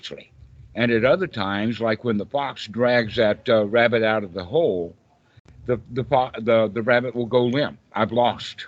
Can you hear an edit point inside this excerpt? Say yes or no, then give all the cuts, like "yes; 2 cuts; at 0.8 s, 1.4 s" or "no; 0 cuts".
no; 0 cuts